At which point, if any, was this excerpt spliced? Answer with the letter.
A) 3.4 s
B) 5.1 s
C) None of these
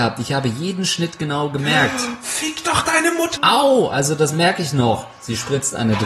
A